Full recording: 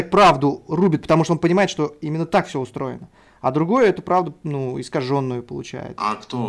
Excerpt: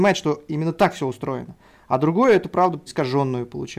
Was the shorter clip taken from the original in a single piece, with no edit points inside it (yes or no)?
no